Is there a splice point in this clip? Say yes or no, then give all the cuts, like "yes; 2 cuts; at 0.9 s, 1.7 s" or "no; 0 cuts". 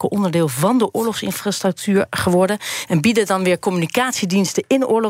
no; 0 cuts